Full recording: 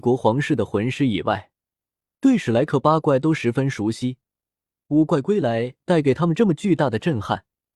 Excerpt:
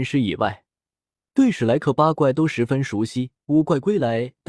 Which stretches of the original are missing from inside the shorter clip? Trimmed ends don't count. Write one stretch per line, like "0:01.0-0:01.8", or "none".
0:04.3-0:04.8